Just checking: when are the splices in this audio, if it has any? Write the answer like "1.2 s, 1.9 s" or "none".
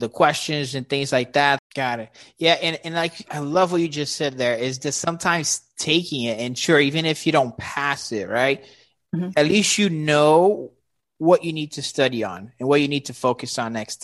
1.6 s